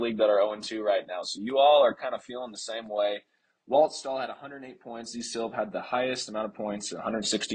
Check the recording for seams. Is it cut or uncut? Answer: uncut